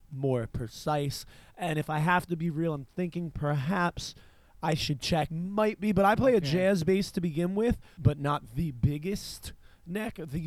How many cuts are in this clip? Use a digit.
2